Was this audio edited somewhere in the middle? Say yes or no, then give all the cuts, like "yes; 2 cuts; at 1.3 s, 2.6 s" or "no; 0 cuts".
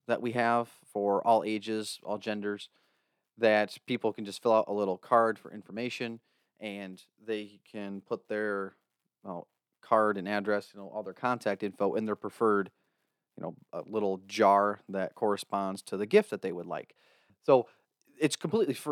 yes; 1 cut; at 17.3 s